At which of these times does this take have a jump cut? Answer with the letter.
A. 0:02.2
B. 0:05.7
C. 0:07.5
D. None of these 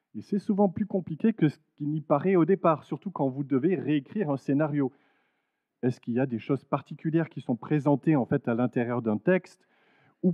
B